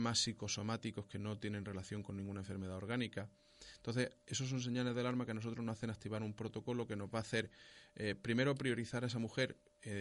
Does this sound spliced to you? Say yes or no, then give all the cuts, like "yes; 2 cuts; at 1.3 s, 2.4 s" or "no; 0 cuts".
no; 0 cuts